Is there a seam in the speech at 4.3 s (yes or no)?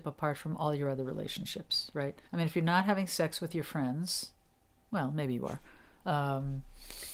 no